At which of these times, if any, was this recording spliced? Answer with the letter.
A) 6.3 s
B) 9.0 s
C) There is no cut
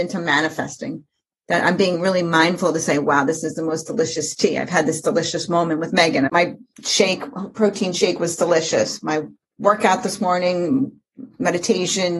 A